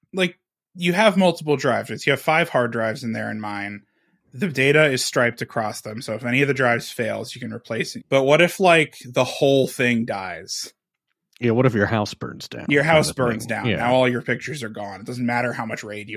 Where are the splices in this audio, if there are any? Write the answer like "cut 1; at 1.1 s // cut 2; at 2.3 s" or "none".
cut 1; at 8.0 s